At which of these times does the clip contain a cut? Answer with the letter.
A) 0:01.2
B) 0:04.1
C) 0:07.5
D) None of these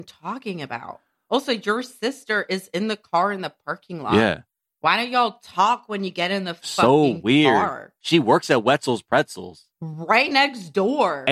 D